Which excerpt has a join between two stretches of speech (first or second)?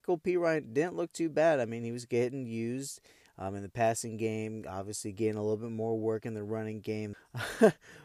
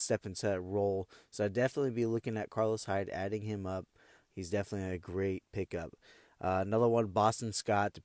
first